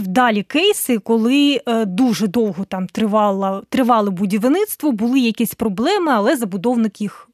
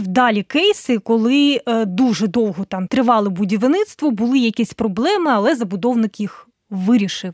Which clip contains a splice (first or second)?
second